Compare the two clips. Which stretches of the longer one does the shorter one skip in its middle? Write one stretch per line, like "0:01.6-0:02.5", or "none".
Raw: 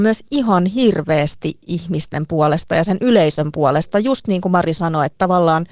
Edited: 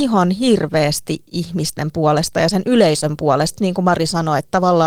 0:03.9-0:04.2